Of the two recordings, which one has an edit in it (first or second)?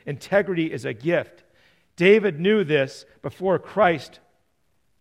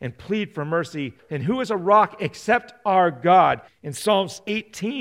second